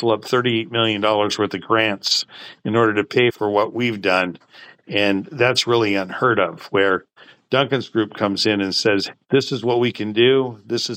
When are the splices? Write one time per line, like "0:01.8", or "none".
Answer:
0:09.1

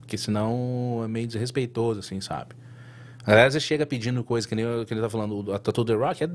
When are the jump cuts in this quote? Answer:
none

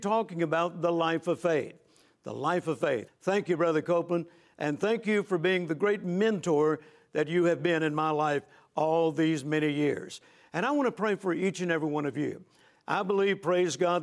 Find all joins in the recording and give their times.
0:03.1
0:12.7

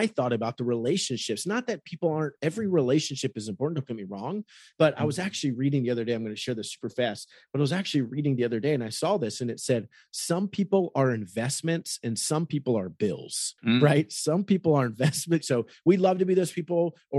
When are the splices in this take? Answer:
0:13.6
0:15.4

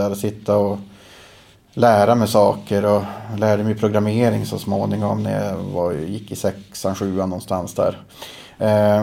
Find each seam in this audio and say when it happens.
none

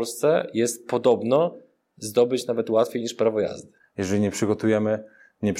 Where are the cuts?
0:03.8

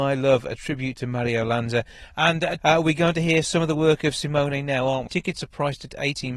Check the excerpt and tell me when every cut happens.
0:02.6
0:05.1

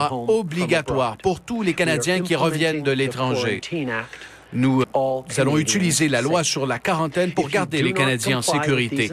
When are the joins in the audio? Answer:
0:04.8

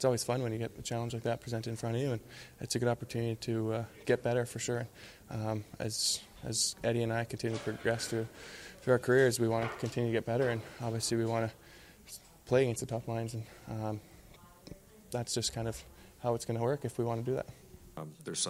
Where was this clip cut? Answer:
0:04.0

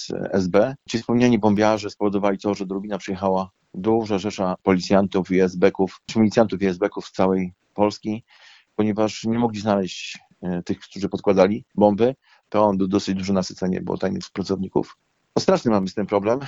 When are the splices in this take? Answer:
0:12.4

